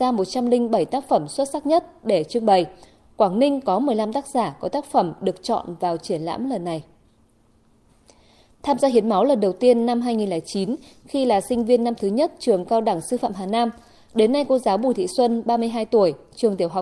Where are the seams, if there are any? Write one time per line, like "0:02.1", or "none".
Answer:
none